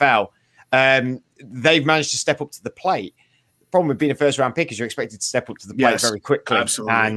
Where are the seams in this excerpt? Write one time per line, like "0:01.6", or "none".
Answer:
none